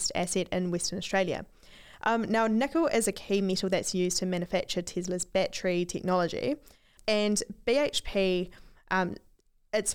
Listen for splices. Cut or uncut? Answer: cut